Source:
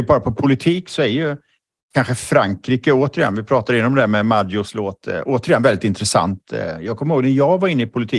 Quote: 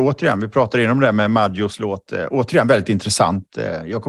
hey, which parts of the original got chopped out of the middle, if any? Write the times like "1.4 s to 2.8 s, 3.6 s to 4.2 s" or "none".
none